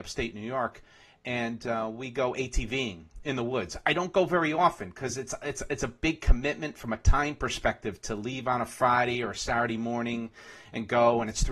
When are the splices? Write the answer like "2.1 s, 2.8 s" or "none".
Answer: none